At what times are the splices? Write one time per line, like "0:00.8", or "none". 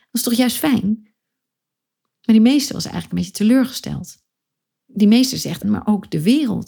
0:05.6